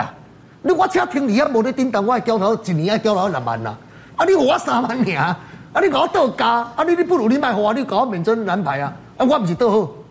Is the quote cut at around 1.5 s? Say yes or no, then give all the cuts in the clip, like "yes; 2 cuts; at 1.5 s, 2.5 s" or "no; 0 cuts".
no; 0 cuts